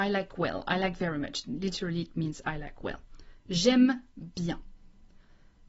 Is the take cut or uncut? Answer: uncut